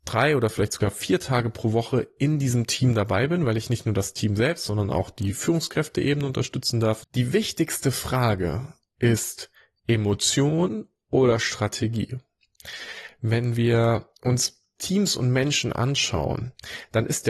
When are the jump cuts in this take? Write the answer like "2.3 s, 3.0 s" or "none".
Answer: 7.0 s, 14.1 s